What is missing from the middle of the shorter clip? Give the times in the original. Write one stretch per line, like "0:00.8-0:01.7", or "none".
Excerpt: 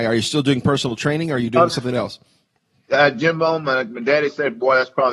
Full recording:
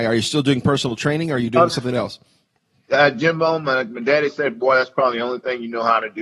none